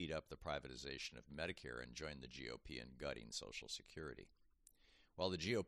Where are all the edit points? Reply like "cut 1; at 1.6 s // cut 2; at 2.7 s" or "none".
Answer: none